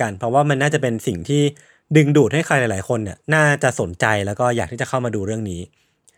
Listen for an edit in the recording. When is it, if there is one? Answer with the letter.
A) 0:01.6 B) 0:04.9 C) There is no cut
C